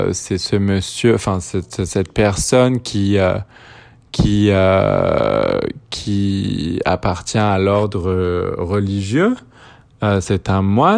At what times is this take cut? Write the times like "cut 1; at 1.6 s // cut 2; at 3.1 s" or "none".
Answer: none